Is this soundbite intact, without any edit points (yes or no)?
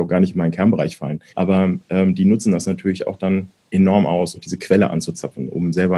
no